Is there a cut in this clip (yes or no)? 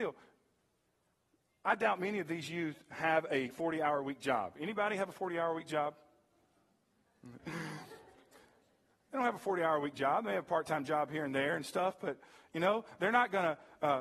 yes